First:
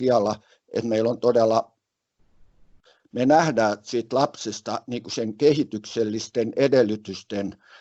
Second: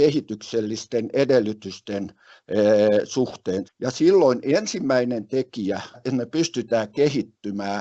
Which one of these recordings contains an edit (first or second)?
second